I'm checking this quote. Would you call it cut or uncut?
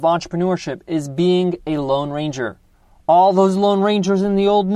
uncut